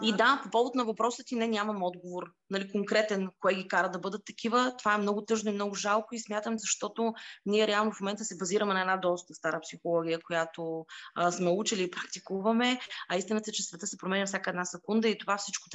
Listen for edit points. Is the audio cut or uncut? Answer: cut